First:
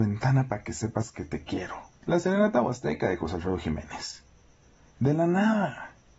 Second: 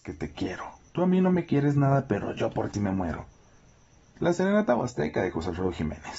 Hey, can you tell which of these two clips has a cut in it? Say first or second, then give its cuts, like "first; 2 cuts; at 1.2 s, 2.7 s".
first; 1 cut; at 1.9 s